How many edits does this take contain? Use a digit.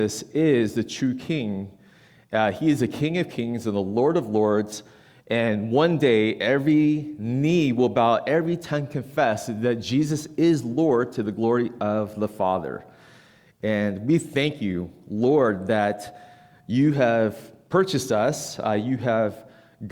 0